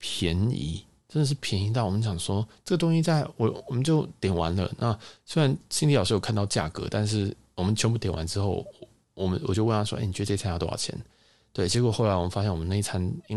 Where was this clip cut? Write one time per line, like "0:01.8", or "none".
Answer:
none